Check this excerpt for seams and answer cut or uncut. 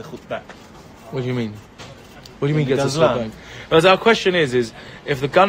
uncut